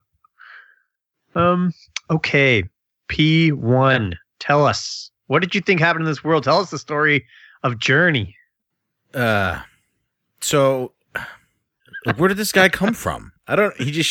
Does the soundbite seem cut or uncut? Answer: uncut